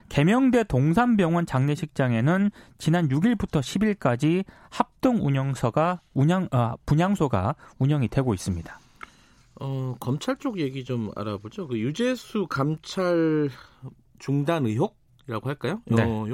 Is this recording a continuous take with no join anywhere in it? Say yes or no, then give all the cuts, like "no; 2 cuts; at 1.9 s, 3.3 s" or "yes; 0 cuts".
yes; 0 cuts